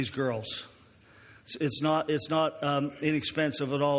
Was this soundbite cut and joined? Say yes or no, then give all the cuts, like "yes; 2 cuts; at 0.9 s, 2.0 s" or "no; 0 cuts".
no; 0 cuts